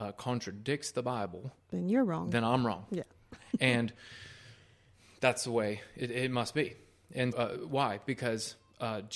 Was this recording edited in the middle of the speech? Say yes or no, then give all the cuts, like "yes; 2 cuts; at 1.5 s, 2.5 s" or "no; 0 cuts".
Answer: yes; 1 cut; at 7.3 s